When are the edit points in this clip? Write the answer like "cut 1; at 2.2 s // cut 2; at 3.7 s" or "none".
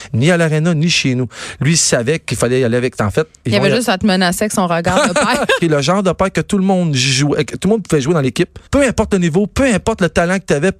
cut 1; at 5.6 s // cut 2; at 8.7 s